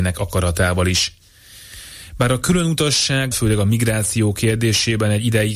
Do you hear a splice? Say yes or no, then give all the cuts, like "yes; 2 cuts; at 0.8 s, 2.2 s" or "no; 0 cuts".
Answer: yes; 1 cut; at 3.3 s